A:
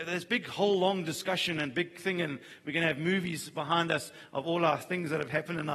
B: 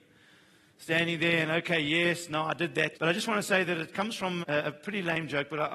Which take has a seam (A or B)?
B